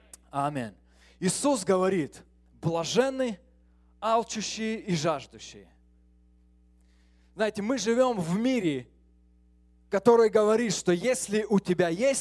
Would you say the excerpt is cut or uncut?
uncut